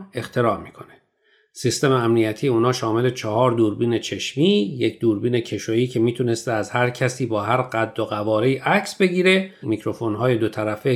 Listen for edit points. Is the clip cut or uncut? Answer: cut